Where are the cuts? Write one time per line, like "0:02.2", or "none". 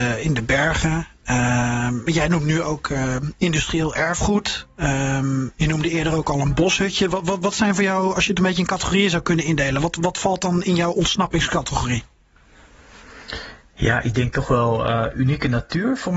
none